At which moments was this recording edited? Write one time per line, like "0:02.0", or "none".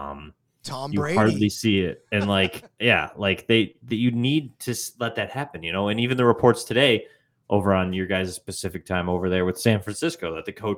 none